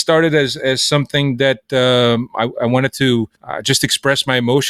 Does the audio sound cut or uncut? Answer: cut